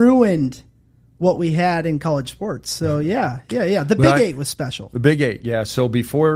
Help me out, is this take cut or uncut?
uncut